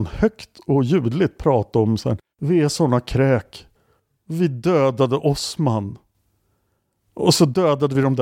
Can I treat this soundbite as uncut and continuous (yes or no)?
no